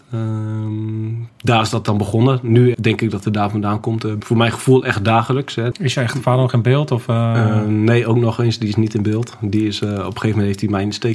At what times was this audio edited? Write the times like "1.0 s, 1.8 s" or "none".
2.7 s, 4.2 s, 5.7 s

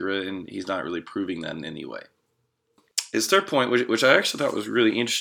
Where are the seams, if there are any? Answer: none

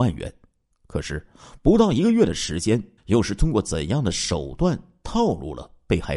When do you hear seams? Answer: 3.0 s

